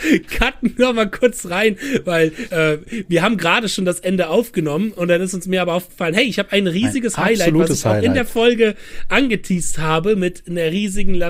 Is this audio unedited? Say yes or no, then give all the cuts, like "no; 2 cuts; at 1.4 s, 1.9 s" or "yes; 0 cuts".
yes; 0 cuts